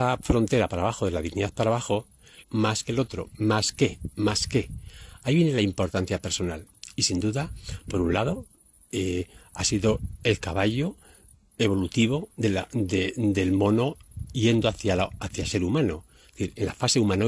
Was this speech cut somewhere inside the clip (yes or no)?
yes